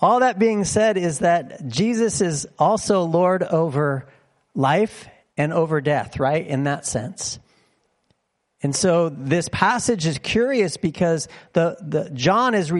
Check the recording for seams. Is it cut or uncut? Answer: uncut